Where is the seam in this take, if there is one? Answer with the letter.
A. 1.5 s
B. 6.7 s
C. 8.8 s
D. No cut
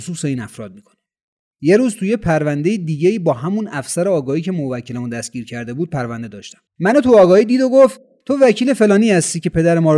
B